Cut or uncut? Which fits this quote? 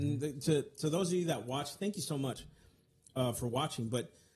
uncut